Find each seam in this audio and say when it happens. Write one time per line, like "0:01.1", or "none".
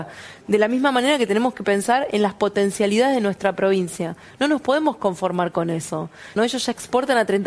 0:04.3
0:06.4